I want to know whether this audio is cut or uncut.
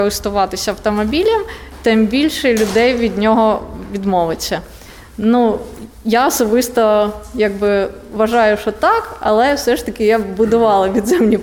uncut